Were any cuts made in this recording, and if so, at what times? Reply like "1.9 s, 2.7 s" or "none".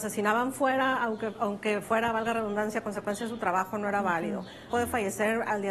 4.7 s